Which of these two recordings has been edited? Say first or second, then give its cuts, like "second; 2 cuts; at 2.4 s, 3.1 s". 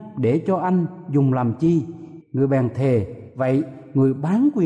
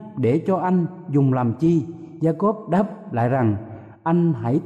first; 1 cut; at 2.2 s